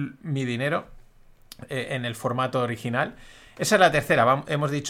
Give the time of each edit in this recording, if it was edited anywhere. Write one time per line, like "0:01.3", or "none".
none